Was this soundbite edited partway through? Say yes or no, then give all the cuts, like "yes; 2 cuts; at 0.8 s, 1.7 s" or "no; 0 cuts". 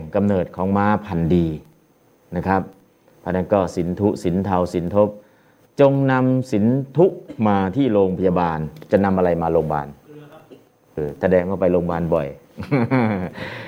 yes; 1 cut; at 11.0 s